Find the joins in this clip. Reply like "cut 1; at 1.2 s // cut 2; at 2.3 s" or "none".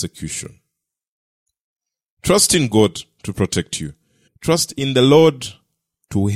cut 1; at 2.0 s // cut 2; at 4.3 s